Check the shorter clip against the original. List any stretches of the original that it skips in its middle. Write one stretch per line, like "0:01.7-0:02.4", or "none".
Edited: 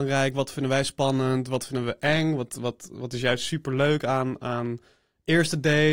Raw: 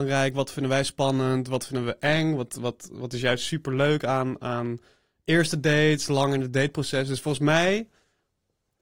none